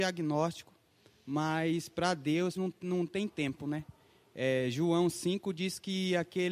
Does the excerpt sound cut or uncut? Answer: cut